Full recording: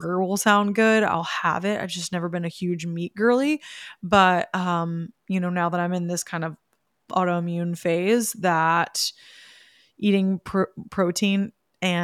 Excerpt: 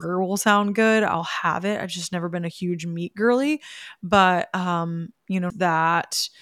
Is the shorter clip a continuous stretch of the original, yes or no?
no